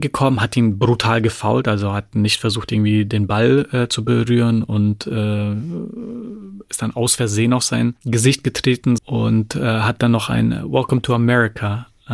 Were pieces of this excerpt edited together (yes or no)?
yes